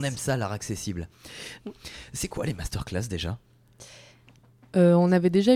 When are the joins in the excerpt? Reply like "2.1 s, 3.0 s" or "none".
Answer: 1.6 s